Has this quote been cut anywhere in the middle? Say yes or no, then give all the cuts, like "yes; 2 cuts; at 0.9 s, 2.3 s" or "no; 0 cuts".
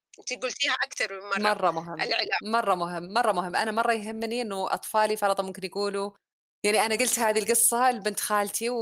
no; 0 cuts